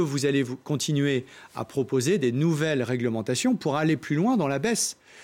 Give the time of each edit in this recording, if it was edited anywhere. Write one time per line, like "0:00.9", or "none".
none